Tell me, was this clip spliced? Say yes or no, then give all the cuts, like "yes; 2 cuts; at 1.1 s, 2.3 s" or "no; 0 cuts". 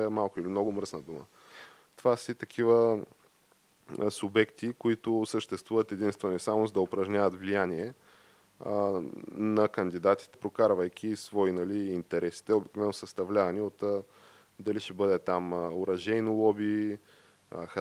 yes; 1 cut; at 10.3 s